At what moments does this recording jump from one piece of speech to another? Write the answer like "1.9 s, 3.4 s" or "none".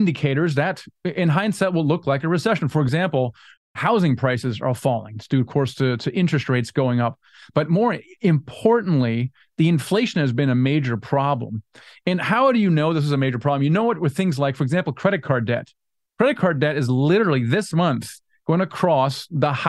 none

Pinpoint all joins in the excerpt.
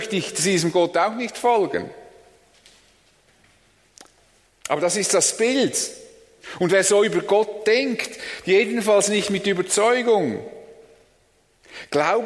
4.5 s, 8.4 s

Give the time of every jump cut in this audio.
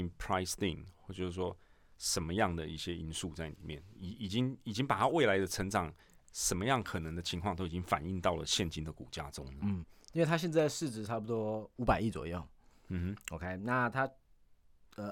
none

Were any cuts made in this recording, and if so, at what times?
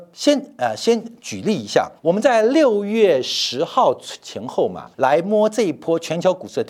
2.0 s, 4.9 s

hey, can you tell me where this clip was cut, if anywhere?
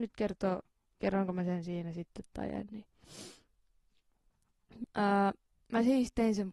4.8 s

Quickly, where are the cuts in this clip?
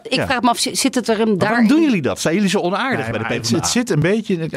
none

